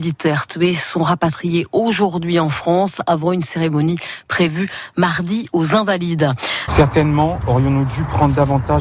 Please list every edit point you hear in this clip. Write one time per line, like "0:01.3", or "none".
0:06.7